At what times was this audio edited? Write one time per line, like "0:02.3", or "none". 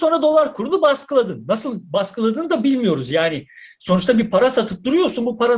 none